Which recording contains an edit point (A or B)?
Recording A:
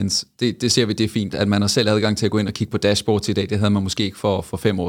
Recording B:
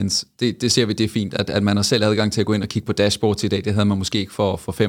A